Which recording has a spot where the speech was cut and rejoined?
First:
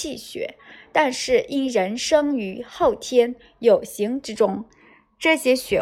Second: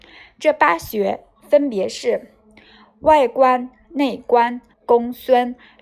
second; 1 cut; at 4.7 s

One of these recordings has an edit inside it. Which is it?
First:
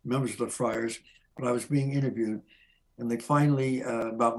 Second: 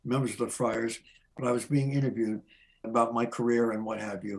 second; 1 cut; at 2.8 s

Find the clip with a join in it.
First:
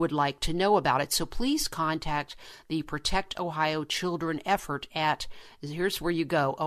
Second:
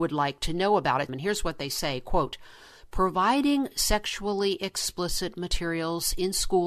second; 1 cut; at 1.1 s

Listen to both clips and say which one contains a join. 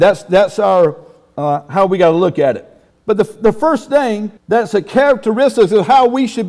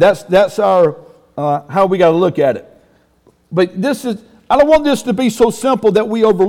first; 2 cuts; at 2.9 s, 4.4 s

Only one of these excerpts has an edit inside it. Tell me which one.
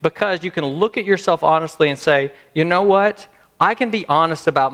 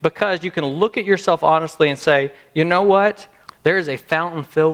second; 1 cut; at 3.5 s

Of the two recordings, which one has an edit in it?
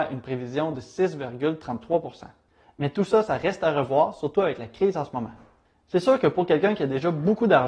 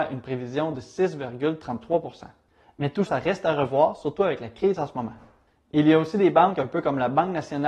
second; 2 cuts; at 3.1 s, 5.6 s

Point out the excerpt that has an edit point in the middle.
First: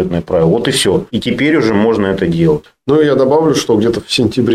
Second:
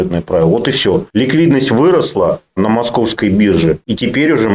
first; 1 cut; at 1.1 s

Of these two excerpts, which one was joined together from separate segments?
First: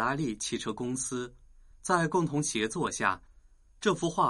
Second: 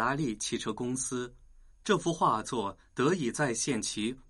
second; 1 cut; at 1.7 s

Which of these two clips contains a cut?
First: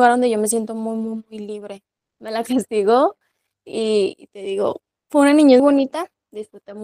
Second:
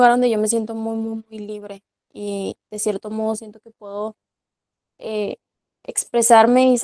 first; 2 cuts; at 2.0 s, 5.6 s

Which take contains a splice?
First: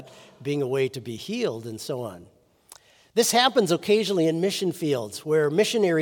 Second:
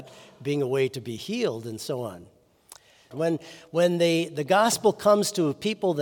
second; 1 cut; at 3.1 s

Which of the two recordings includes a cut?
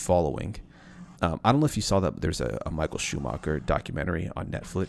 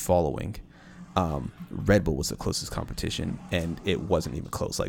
first; 1 cut; at 1.1 s

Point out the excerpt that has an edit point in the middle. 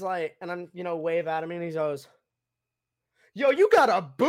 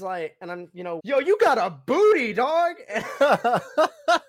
second; 1 cut; at 1.0 s

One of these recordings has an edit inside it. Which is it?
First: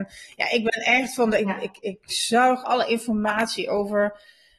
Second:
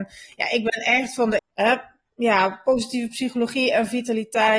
second; 1 cut; at 1.4 s

